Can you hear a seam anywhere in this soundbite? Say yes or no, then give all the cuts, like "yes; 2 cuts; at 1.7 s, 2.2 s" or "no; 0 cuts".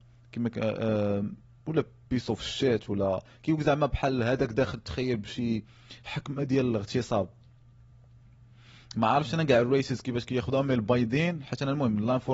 no; 0 cuts